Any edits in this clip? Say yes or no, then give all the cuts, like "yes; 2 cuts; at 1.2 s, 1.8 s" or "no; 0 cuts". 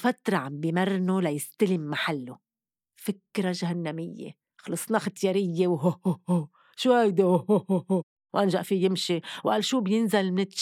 no; 0 cuts